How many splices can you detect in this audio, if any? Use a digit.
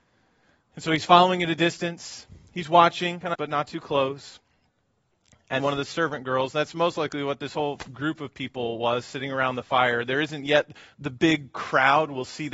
2